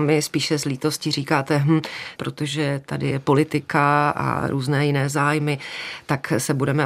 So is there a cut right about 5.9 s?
no; 1 cut; at 2.2 s

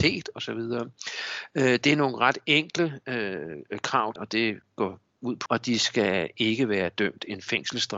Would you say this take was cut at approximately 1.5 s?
no; 2 cuts; at 4.2 s, 5.5 s

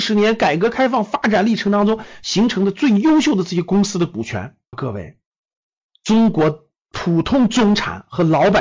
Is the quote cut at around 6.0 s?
no; 1 cut; at 4.7 s

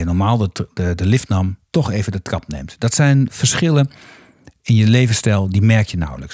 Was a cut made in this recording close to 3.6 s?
no; 1 cut; at 1.7 s

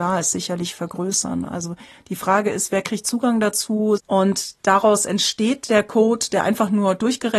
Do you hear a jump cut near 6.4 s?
no; 1 cut; at 4.0 s

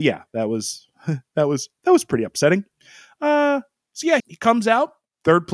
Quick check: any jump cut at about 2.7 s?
no; 1 cut; at 4.2 s

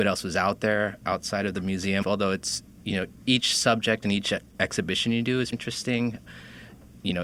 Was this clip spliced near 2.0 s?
yes; 2 cuts; at 2.0 s, 5.5 s

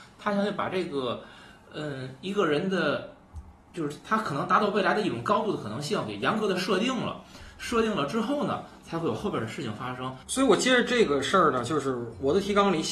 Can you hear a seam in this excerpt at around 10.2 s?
yes; 1 cut; at 10.2 s

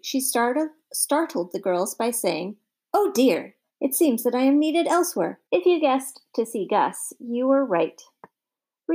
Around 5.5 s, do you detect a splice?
yes; 2 cuts; at 3.7 s, 5.5 s

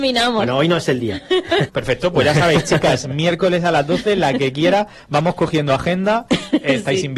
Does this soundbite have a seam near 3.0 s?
no; 1 cut; at 1.7 s

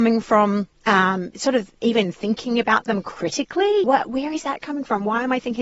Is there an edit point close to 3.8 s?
yes; 1 cut; at 3.8 s

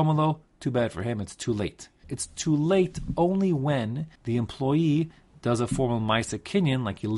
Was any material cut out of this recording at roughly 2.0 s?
yes; 2 cuts; at 2.0 s, 4.2 s

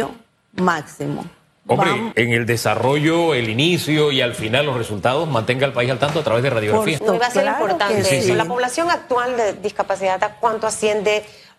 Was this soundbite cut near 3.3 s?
no; 2 cuts; at 2.1 s, 7.0 s

